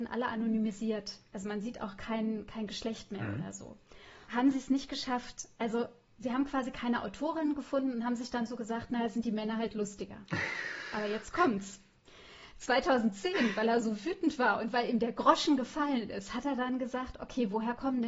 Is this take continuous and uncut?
no; 1 cut; at 4.3 s

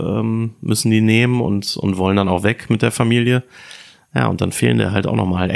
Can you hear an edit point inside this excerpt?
no; 0 cuts

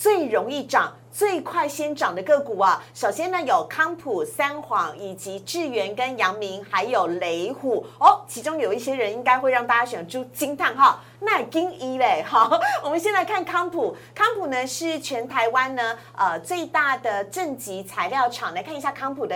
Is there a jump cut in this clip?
no; 0 cuts

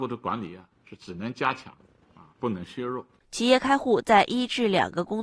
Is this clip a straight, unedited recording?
no; 1 cut; at 3.2 s

